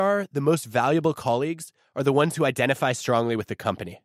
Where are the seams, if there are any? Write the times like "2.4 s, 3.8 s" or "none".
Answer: none

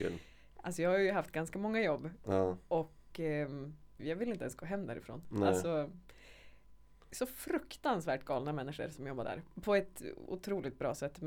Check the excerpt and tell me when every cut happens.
4.0 s

